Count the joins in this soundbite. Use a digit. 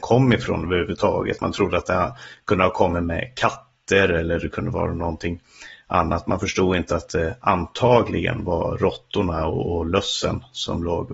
0